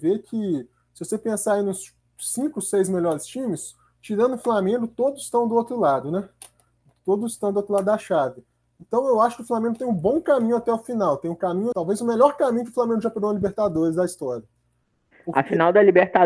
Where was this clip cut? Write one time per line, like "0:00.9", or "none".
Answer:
0:11.7